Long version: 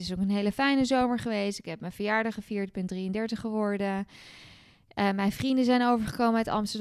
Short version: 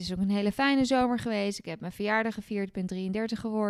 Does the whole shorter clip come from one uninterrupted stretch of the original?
yes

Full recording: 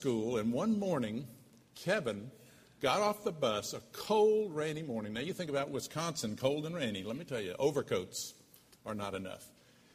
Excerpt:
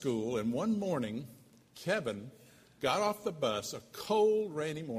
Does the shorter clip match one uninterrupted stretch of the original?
yes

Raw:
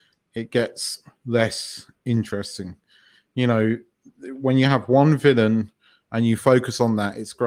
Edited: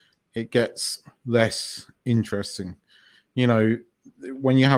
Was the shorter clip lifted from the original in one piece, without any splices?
yes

